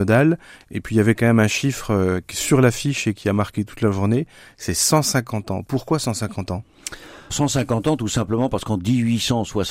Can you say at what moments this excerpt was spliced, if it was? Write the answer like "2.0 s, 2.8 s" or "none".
7.3 s